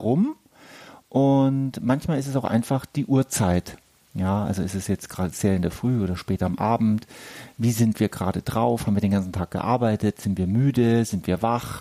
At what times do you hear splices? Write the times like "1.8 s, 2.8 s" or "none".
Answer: none

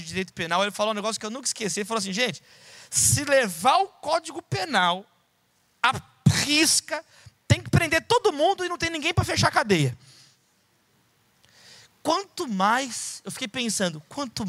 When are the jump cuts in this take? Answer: none

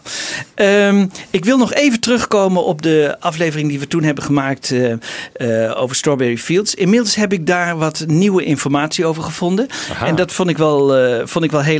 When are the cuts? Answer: none

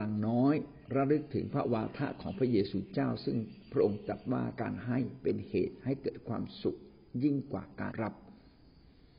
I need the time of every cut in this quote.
7.9 s

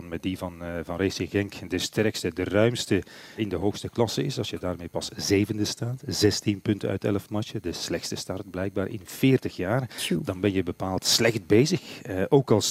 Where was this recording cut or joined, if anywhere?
3.4 s

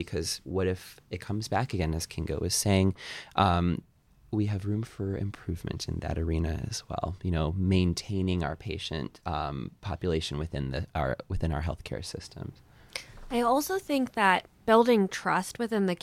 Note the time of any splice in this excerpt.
none

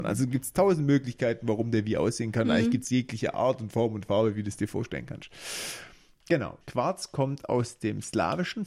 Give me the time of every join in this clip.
6.6 s

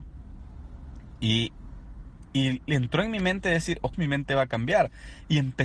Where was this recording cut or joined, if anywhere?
3.9 s

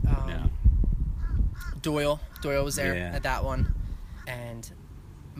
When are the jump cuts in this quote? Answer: 4.2 s

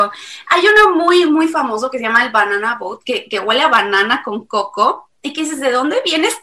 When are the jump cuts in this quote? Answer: none

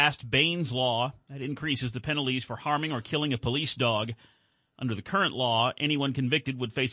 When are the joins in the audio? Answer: none

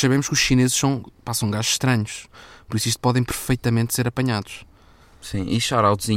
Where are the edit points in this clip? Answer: none

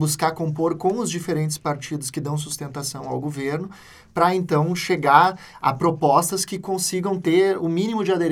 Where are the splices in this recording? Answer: none

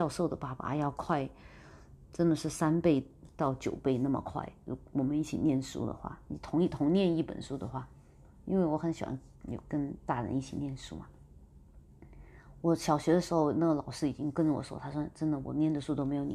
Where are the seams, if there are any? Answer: none

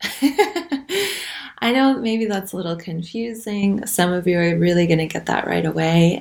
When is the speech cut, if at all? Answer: none

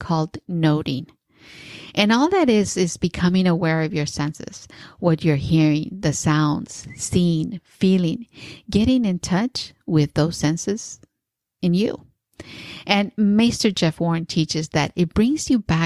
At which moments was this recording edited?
none

